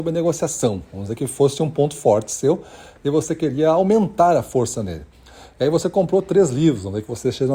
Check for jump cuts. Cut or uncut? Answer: uncut